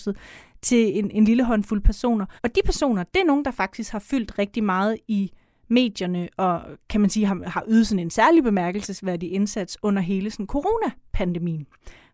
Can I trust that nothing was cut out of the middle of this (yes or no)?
no